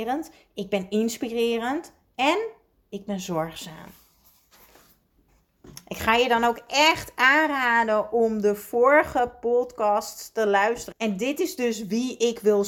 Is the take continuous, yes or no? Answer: no